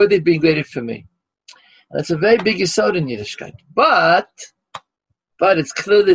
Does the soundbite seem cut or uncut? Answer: uncut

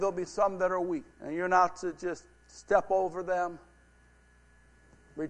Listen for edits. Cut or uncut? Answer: cut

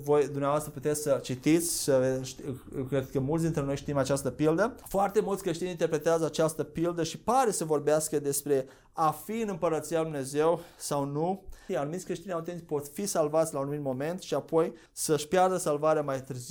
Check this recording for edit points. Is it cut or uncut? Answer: cut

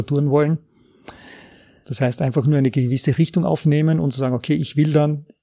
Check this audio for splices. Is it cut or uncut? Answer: cut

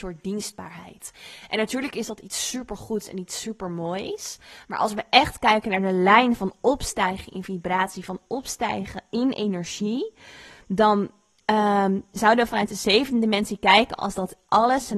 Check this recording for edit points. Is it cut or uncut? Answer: uncut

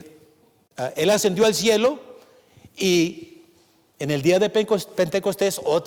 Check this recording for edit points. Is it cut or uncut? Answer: uncut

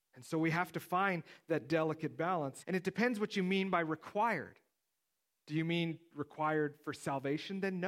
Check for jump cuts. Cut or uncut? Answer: cut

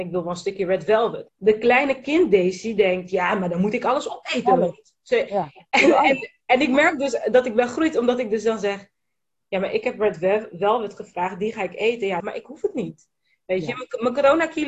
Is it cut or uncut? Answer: cut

